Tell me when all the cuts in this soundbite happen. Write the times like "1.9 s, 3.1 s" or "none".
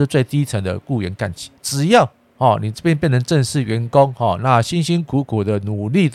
1.6 s